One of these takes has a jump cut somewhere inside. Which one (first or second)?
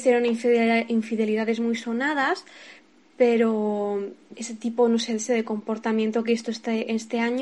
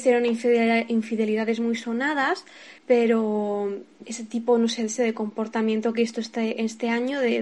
second